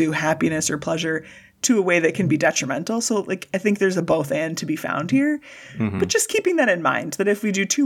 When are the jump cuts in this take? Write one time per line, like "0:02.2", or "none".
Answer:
none